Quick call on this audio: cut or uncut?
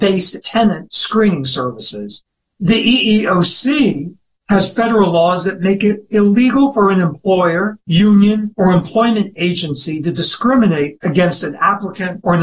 uncut